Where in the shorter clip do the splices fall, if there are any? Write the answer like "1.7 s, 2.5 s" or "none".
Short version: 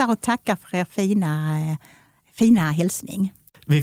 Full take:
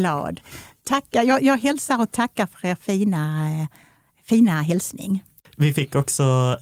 none